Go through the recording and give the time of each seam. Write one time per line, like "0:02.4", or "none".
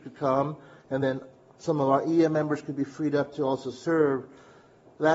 none